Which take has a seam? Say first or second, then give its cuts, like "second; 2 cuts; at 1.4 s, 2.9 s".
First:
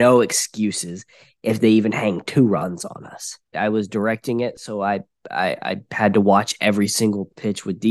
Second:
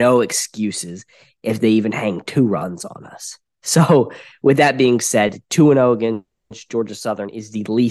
first; 1 cut; at 3.5 s